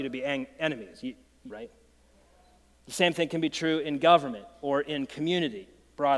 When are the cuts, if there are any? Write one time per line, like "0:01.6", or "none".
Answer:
0:01.5